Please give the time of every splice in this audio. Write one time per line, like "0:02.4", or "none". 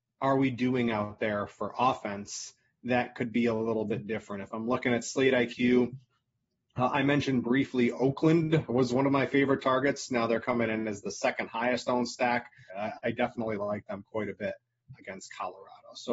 0:12.7
0:14.9